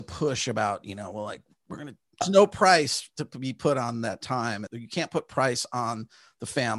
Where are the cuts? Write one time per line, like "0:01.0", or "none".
0:02.2
0:04.7